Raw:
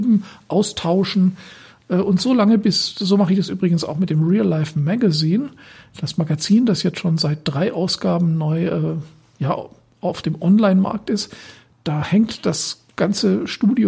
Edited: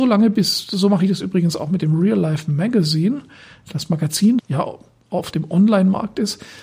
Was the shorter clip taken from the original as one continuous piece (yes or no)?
no